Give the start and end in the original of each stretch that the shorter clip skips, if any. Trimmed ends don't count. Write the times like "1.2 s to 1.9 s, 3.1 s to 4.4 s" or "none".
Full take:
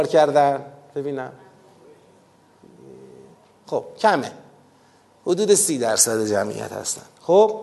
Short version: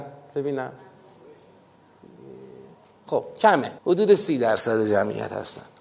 4.4 s to 5.2 s